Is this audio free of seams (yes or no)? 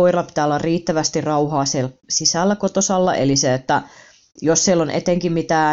yes